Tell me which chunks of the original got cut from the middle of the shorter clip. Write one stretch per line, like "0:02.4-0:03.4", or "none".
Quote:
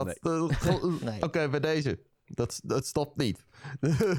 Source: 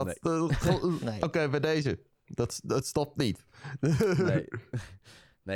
none